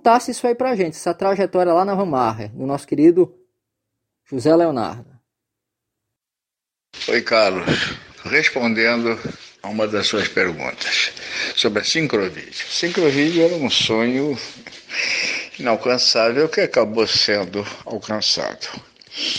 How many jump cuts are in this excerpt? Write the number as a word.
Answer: two